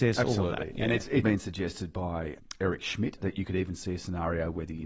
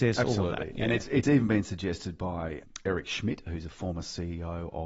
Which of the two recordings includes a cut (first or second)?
first